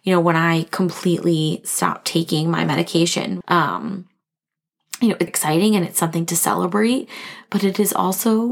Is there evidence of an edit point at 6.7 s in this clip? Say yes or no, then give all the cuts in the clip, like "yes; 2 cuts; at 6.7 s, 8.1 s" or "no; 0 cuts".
no; 2 cuts; at 3.4 s, 5.3 s